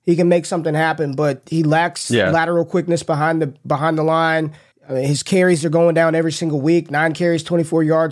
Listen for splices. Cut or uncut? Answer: cut